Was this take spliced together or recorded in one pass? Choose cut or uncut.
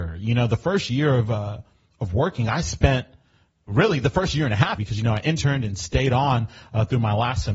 cut